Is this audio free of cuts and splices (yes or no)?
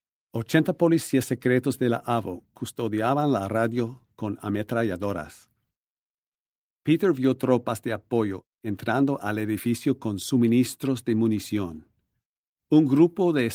yes